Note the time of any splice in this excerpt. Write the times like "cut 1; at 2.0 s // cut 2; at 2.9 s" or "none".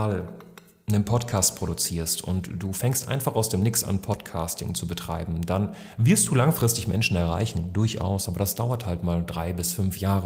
none